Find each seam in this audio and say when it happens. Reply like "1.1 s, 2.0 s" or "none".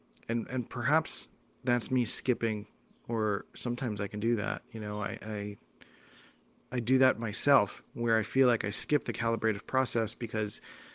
5.2 s

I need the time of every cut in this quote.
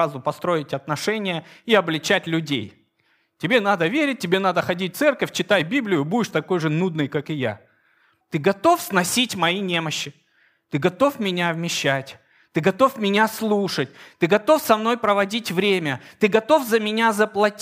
8.2 s

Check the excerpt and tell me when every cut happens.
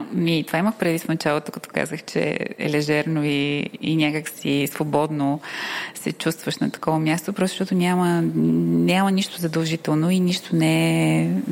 none

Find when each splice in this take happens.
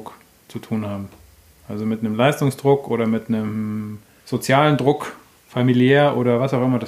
none

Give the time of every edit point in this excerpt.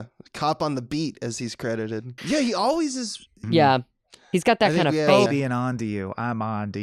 2.2 s, 3.4 s, 5.3 s

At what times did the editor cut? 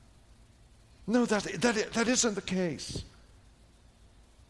none

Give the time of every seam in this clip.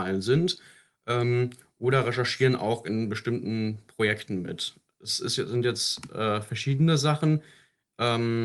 none

